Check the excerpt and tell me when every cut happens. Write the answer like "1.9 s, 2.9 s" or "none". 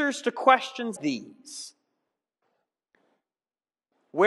1.0 s